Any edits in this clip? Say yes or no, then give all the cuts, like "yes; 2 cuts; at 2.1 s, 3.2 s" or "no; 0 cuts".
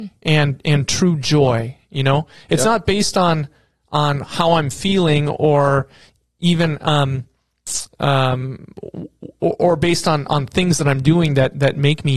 no; 0 cuts